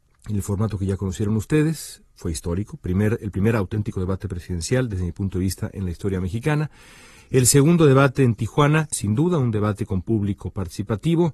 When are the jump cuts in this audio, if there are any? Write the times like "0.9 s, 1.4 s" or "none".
8.9 s

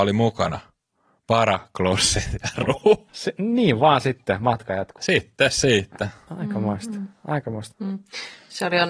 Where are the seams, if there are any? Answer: 3.1 s, 7.7 s

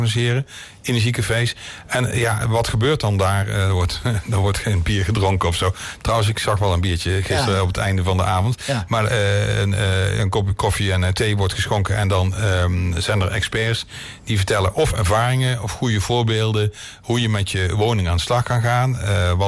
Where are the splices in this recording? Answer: none

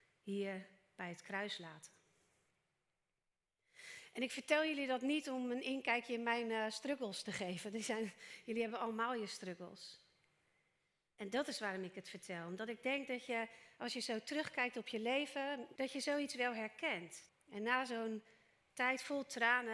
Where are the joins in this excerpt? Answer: 15.8 s, 17.3 s

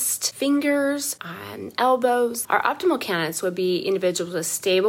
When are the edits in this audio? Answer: 2.5 s

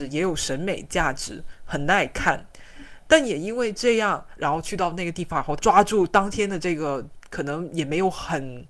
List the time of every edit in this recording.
4.4 s, 5.6 s

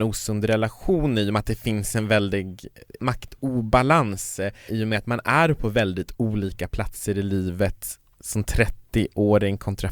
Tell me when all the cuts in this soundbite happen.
4.7 s

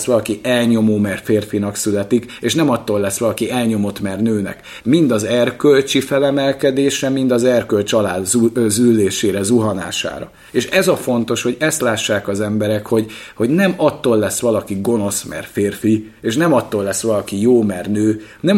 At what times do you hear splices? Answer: 4.8 s

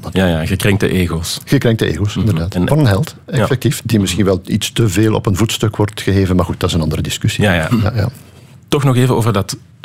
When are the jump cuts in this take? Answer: 2.7 s, 7.7 s

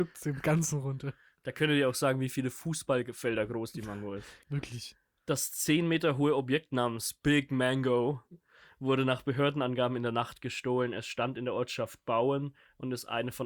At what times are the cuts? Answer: 4.4 s

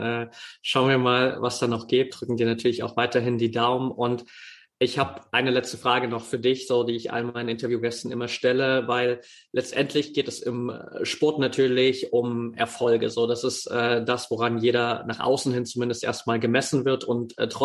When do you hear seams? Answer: 2.1 s

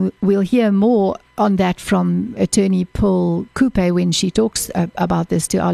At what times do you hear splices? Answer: 2.4 s

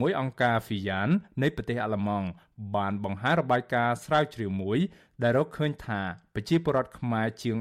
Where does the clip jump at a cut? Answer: none

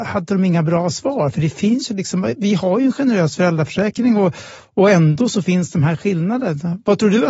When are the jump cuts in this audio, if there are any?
none

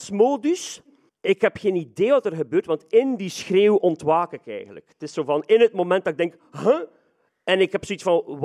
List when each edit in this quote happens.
1.1 s

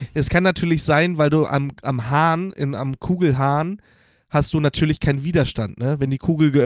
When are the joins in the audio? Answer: none

